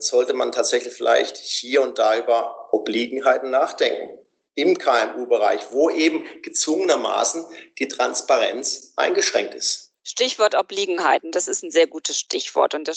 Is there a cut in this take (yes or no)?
no